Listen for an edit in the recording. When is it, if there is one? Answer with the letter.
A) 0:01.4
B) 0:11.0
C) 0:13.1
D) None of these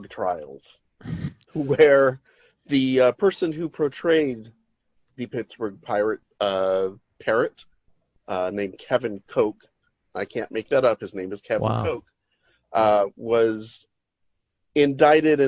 A